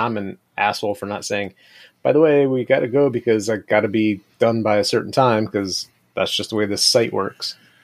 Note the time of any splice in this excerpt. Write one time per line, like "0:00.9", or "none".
none